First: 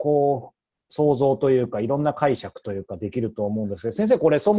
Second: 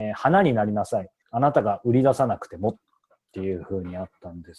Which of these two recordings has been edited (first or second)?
second